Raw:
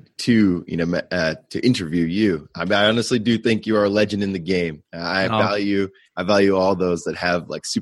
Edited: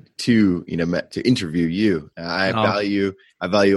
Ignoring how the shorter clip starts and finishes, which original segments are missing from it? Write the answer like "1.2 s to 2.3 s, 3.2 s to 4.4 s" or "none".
1.1 s to 1.5 s, 2.5 s to 4.9 s